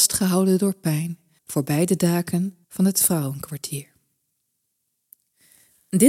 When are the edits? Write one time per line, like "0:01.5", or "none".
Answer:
0:01.4
0:02.6